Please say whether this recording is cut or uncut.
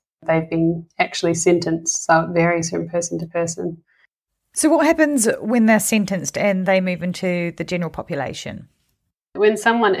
uncut